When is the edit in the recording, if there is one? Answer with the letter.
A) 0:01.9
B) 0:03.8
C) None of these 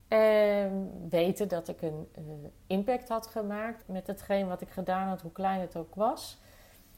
B